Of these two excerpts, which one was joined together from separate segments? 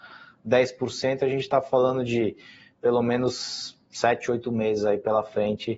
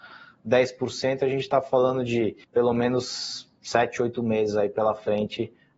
second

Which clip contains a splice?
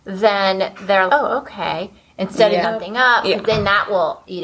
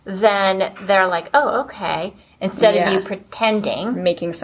first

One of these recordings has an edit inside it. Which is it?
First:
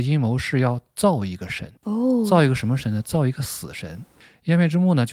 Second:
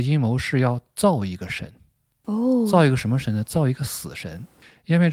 first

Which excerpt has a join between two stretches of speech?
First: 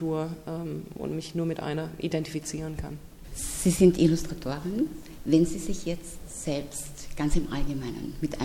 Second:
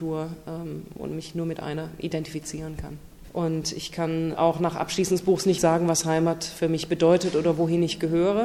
second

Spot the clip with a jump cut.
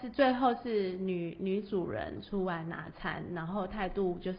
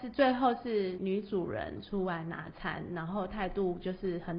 second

